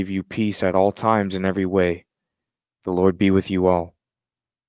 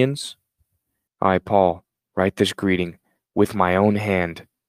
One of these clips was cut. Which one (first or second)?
second